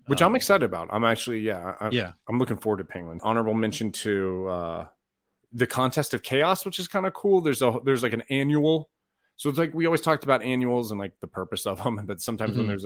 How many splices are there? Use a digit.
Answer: 1